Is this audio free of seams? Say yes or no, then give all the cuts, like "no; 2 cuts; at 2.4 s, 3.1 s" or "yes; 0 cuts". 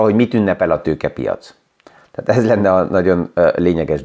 yes; 0 cuts